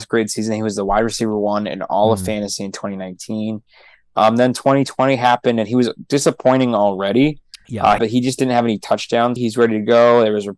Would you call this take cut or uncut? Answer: cut